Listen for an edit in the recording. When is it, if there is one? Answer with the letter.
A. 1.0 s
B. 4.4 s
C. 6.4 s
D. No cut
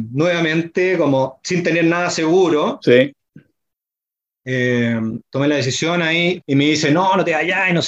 C